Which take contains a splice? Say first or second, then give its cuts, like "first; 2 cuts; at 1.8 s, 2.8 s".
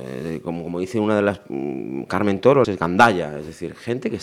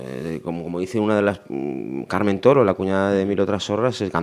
first; 1 cut; at 2.6 s